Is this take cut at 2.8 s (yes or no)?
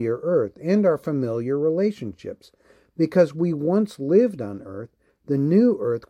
no